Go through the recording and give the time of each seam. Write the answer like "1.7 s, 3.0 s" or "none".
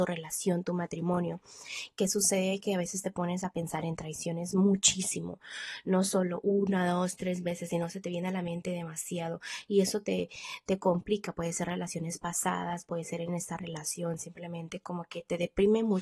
none